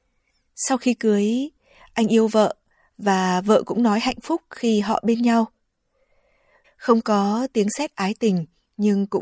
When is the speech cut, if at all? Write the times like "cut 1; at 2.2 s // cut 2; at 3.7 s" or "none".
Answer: cut 1; at 6.6 s